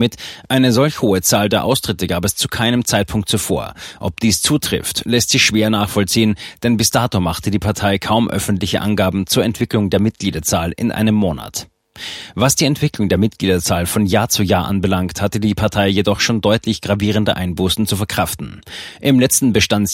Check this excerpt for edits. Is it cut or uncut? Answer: uncut